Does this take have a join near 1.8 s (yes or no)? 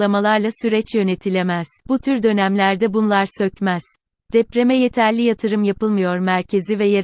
yes